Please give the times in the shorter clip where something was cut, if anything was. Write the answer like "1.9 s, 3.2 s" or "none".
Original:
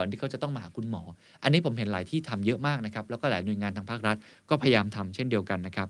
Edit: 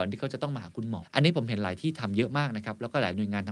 1.0 s

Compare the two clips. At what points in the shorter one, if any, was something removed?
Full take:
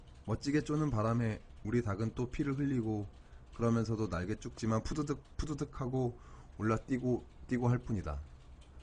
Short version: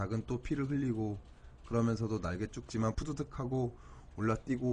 2.9 s

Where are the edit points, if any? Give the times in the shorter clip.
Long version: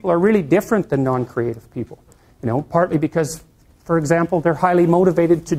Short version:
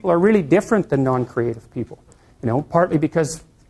none

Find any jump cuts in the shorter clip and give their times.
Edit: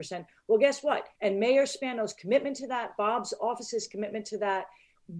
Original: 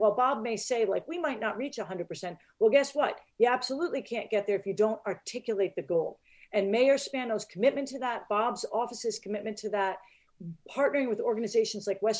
1.2 s

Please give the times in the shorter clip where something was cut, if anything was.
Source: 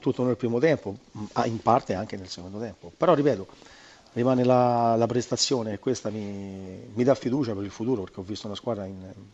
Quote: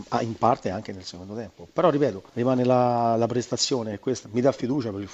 2.3 s, 4.2 s

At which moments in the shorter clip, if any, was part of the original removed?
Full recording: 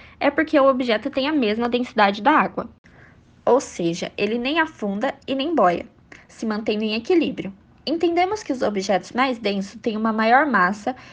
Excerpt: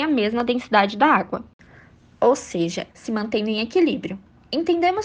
2.9 s

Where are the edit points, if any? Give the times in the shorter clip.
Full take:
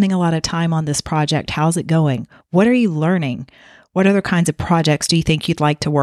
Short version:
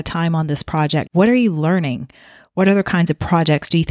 1.1 s

